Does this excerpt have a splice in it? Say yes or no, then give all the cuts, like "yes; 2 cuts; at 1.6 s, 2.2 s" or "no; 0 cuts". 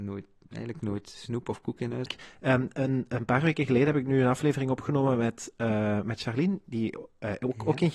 yes; 1 cut; at 2.1 s